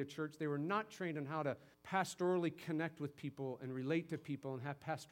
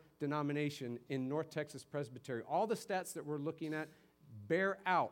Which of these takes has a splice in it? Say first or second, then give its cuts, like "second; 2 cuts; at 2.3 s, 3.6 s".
first; 1 cut; at 1.7 s